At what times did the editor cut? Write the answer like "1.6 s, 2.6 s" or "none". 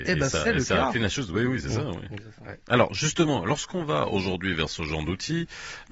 2.6 s